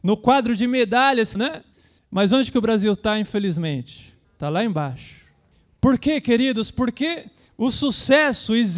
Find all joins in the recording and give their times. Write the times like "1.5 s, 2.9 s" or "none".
1.3 s